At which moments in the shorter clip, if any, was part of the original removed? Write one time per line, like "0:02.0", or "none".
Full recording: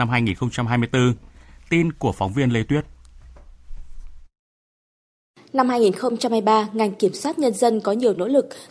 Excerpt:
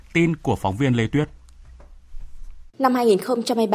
0:02.7